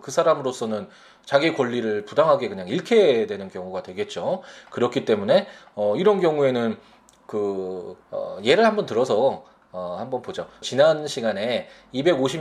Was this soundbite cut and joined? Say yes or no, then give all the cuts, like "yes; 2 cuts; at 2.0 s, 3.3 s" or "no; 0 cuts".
yes; 2 cuts; at 8.0 s, 10.6 s